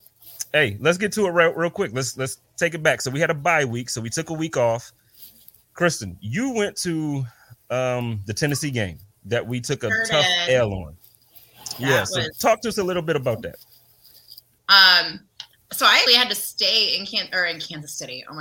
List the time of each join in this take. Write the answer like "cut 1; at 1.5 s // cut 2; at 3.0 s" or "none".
cut 1; at 14.6 s // cut 2; at 16.1 s